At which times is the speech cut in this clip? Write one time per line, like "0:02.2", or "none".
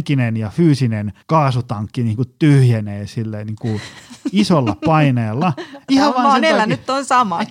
0:01.2
0:05.9

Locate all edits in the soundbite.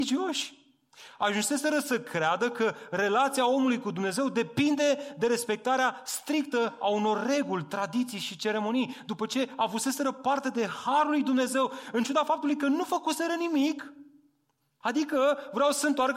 0:14.8

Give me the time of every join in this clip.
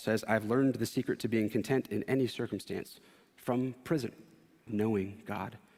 0:04.7

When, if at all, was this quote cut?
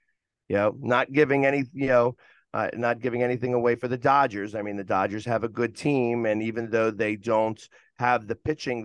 none

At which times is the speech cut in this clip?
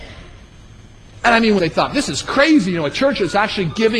0:01.6

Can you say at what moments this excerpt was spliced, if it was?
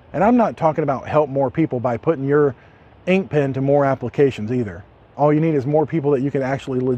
0:05.1

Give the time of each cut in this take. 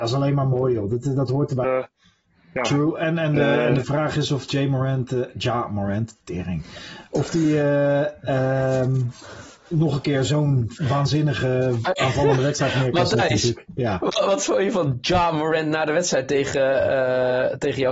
0:01.6

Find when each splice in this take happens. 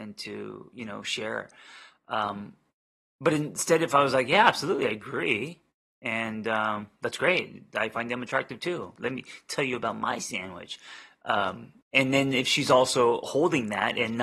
0:09.0
0:11.8

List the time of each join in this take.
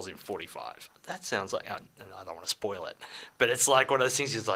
0:01.0

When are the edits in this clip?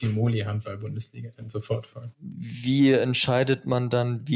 0:02.1

